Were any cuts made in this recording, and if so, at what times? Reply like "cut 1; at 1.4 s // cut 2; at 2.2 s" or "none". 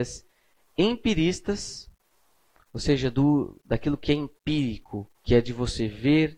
cut 1; at 5.2 s